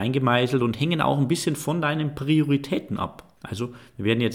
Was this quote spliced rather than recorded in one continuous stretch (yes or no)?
yes